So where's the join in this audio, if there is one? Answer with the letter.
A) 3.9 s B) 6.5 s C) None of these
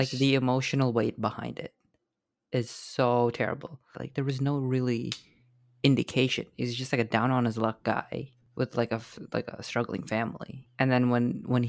A